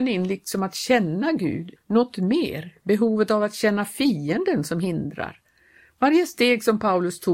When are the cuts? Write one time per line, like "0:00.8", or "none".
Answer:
0:01.8

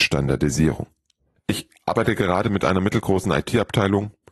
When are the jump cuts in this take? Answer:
0:01.4

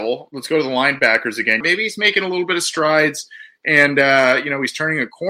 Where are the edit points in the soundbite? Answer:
0:01.6

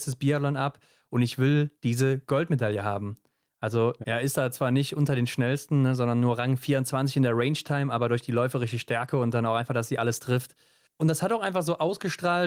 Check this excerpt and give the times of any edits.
0:04.0
0:10.8

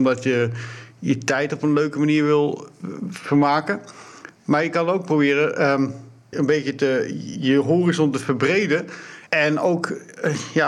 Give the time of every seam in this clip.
0:06.3
0:07.3
0:09.3

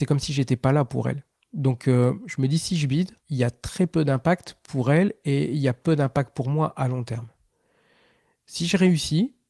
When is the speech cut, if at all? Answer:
0:03.2

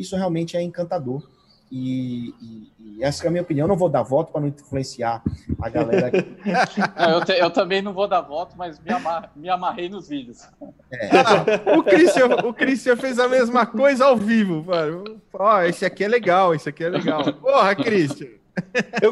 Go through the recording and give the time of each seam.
none

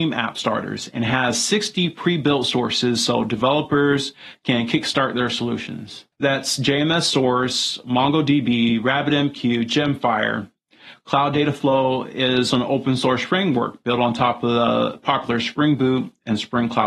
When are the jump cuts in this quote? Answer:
0:06.1
0:12.5

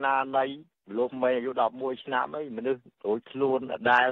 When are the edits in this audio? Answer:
0:01.1

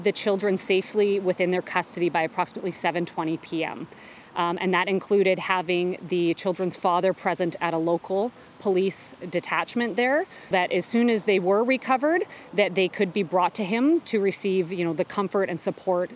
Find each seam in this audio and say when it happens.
0:10.5

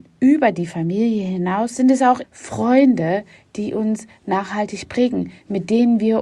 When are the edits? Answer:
0:02.2

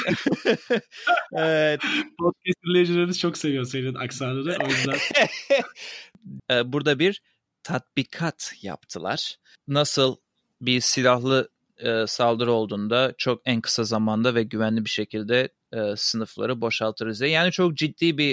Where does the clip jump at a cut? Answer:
0:06.4

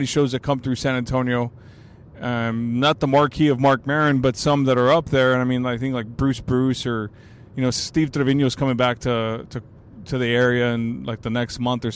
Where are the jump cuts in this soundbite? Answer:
0:07.7

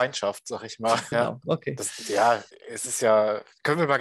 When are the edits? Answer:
0:01.1
0:02.5

